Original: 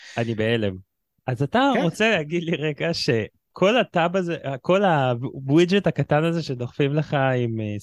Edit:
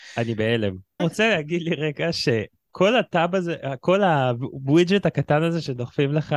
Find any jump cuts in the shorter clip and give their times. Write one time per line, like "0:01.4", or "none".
0:01.0

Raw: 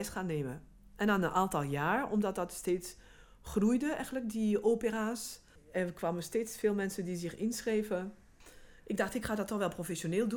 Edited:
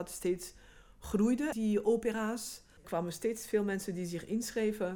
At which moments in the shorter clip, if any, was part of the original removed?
0:01.5
0:02.8

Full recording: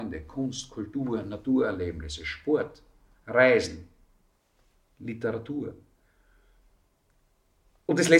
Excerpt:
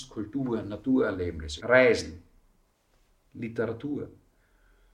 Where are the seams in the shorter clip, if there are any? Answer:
0:01.6

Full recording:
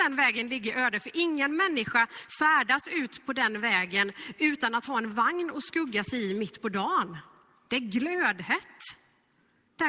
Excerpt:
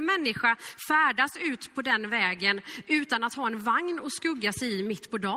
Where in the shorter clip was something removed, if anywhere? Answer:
none

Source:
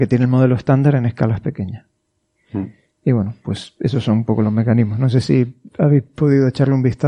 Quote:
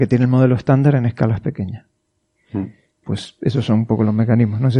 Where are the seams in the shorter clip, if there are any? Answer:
0:03.0

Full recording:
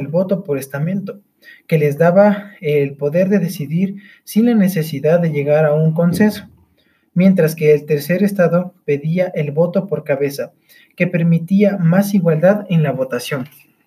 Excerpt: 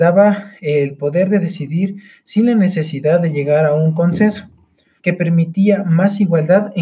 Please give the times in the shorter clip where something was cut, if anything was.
0:05.0

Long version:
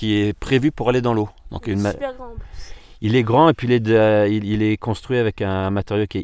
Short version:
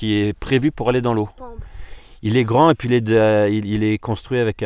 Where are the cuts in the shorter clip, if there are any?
0:01.4

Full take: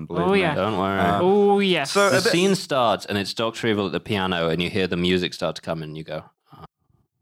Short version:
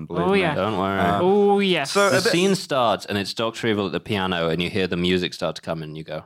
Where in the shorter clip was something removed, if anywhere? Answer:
none

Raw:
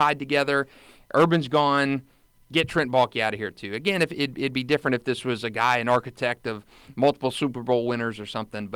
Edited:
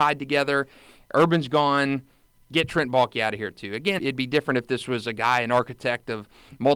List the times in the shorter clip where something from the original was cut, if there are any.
0:04.0

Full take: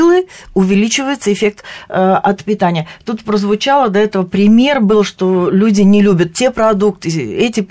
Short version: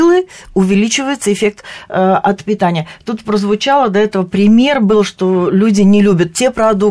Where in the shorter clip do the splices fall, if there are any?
none

